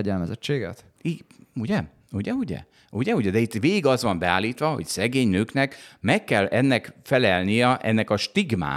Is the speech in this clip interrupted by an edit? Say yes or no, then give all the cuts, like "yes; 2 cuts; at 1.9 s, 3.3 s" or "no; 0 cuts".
no; 0 cuts